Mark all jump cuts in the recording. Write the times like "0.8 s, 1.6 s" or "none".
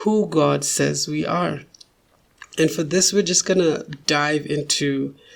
none